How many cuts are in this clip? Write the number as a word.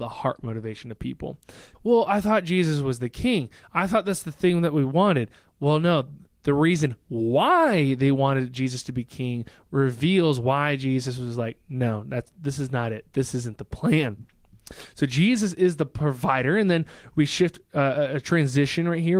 one